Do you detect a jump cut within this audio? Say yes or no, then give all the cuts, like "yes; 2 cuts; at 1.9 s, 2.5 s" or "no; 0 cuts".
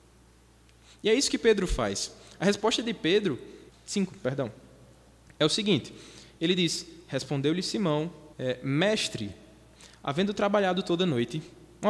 yes; 2 cuts; at 3.7 s, 8.3 s